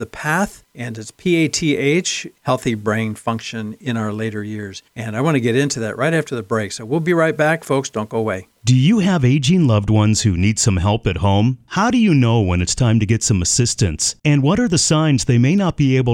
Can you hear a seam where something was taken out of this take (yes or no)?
yes